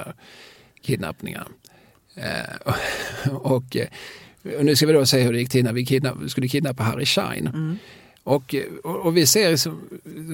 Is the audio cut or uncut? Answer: uncut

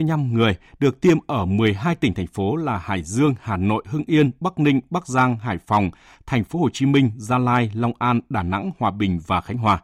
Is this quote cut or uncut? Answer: uncut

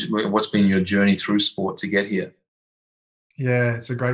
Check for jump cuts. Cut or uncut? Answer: uncut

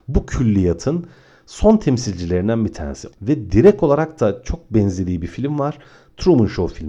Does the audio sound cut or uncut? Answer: cut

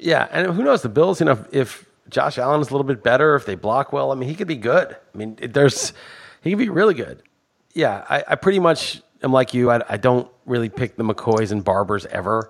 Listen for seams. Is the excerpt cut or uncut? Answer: uncut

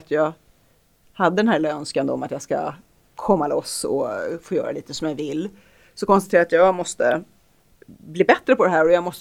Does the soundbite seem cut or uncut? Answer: uncut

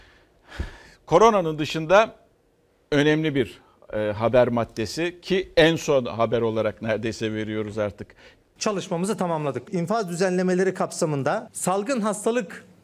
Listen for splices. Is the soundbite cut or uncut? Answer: cut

